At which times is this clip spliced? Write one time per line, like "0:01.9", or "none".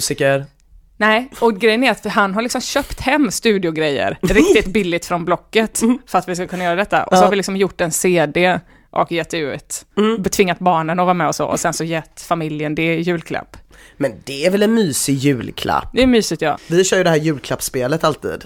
0:16.6

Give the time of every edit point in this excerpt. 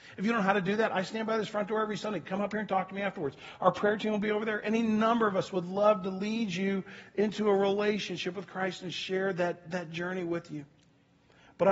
none

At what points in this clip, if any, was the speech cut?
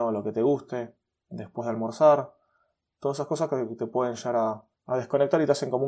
0:04.7

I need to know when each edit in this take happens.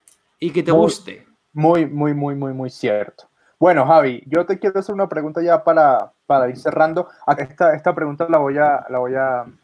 0:07.4

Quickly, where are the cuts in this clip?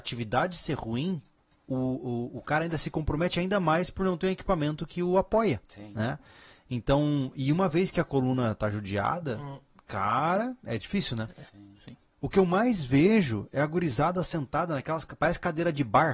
0:11.5

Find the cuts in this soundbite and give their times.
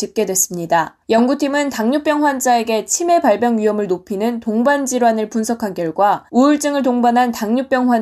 0:01.0
0:06.3

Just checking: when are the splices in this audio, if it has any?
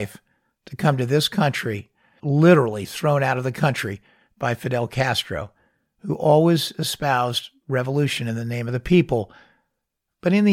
0:02.2

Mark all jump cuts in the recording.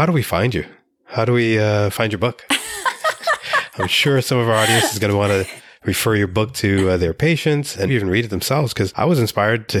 0:07.9

